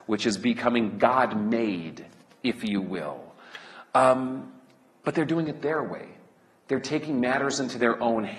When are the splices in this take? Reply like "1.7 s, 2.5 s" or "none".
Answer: none